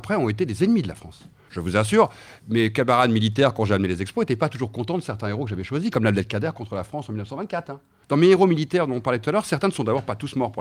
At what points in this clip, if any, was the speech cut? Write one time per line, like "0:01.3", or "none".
0:01.5
0:05.9
0:08.0